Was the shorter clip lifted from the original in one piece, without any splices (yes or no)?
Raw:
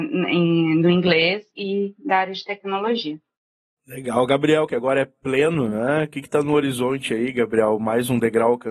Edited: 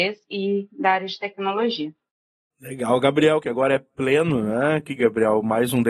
no